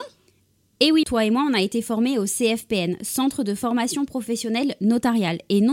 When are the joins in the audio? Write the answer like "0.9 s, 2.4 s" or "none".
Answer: 1.0 s